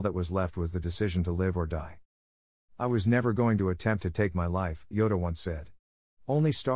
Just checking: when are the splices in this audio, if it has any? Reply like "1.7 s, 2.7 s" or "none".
4.9 s